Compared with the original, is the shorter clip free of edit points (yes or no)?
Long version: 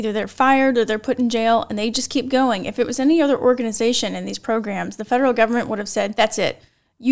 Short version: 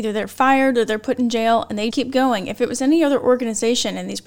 no